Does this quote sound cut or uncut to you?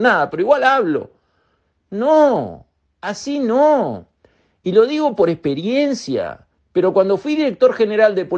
cut